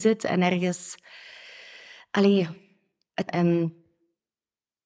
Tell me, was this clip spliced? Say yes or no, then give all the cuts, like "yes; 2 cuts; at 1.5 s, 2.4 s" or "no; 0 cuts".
yes; 1 cut; at 3.3 s